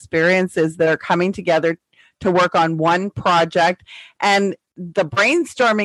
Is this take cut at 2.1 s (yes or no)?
no